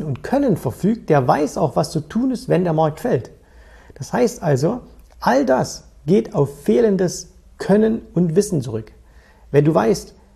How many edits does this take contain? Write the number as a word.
zero